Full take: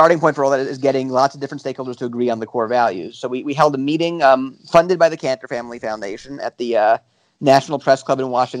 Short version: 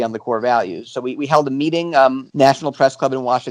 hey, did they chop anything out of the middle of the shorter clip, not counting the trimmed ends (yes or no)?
yes